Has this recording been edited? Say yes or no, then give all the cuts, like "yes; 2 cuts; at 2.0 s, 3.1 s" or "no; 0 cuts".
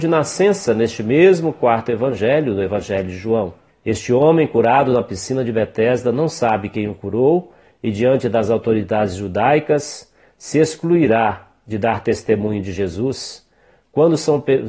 yes; 1 cut; at 3.7 s